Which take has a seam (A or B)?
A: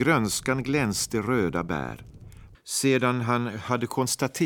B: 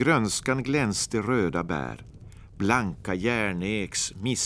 A